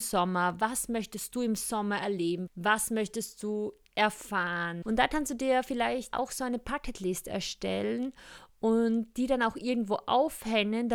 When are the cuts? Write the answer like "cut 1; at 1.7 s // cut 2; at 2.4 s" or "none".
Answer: cut 1; at 2.5 s // cut 2; at 4.8 s // cut 3; at 6.1 s